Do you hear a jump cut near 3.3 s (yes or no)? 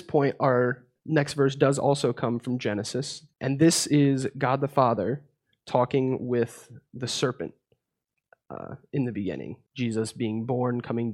yes